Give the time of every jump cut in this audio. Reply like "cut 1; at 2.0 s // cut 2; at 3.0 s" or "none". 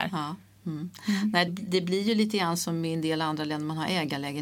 cut 1; at 1.5 s